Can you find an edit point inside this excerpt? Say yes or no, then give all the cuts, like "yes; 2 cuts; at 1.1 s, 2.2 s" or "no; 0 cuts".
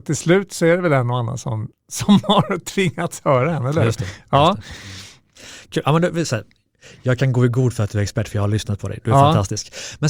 yes; 1 cut; at 1.7 s